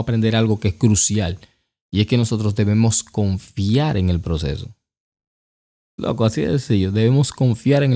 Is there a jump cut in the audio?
no; 0 cuts

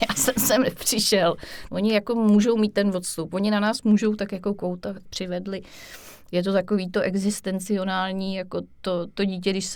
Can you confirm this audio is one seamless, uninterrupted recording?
no; 2 cuts; at 1.7 s, 5.1 s

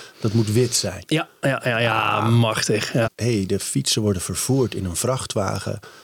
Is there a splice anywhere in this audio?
yes; 2 cuts; at 1.1 s, 3.0 s

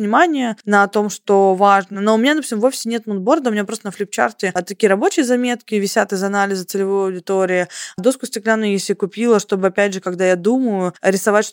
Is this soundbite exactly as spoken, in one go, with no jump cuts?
yes; 0 cuts

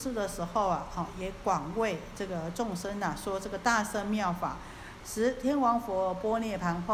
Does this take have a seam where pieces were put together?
yes; 1 cut; at 5.0 s

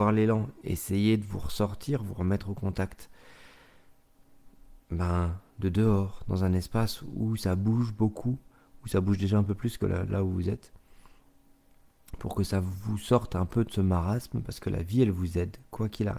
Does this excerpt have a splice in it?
no; 0 cuts

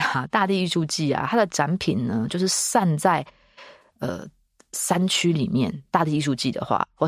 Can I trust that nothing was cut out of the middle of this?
yes; 0 cuts

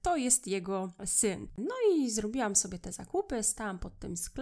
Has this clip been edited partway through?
yes; 1 cut; at 1.6 s

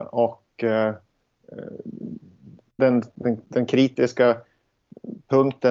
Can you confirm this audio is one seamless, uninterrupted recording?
no; 1 cut; at 2.8 s

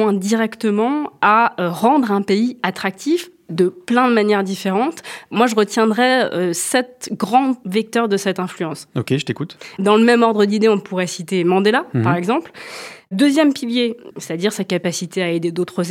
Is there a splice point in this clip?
yes; 2 cuts; at 9.8 s, 14.1 s

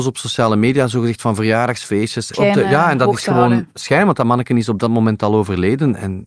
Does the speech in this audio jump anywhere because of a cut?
yes; 1 cut; at 2.3 s

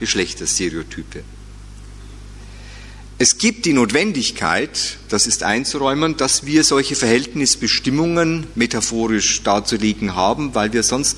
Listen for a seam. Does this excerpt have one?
no; 0 cuts

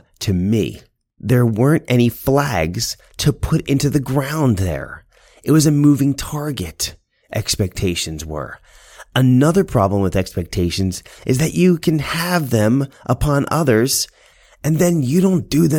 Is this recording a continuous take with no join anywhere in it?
yes; 0 cuts

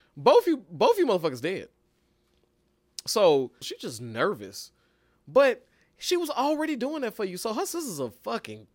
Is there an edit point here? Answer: yes; 1 cut; at 3.6 s

